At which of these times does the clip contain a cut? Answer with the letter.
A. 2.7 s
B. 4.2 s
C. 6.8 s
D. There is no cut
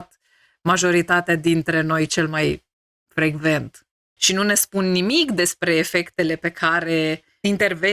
B